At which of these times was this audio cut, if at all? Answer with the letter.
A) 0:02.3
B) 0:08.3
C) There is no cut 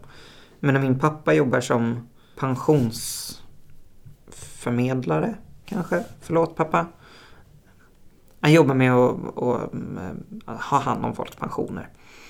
A